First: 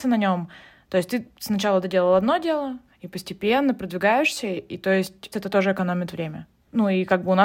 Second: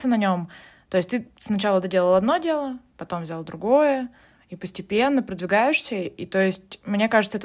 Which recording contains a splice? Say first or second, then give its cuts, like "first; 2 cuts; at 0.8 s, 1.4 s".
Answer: first; 2 cuts; at 2.9 s, 5.3 s